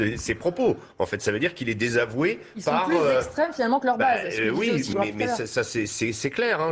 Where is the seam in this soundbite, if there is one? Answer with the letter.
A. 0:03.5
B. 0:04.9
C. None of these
B